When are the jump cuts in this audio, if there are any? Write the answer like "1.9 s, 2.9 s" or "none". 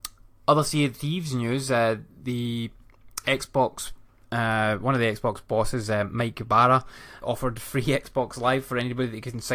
7.2 s